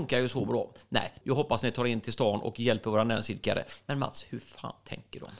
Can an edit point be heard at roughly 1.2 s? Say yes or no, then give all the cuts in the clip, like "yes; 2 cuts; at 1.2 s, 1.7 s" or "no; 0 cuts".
yes; 1 cut; at 1.2 s